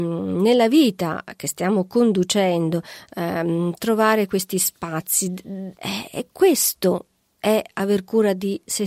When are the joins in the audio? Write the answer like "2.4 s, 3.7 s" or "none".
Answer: 5.7 s